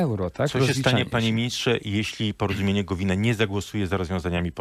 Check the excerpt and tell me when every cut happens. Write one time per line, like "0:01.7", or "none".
none